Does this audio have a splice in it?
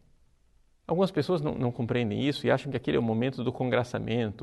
no; 0 cuts

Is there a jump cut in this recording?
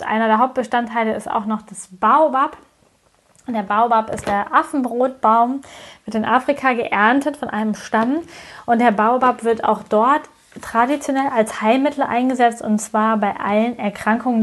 no; 0 cuts

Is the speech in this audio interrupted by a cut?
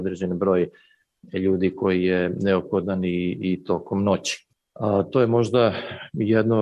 no; 0 cuts

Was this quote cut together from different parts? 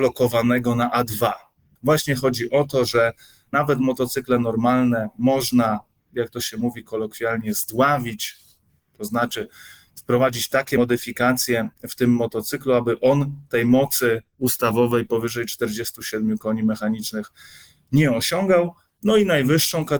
yes; 1 cut; at 1.8 s

